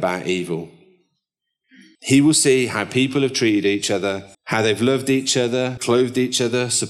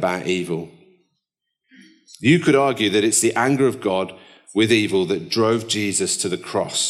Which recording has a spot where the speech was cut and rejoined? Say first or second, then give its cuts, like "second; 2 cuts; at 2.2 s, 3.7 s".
first; 3 cuts; at 2.0 s, 4.3 s, 5.8 s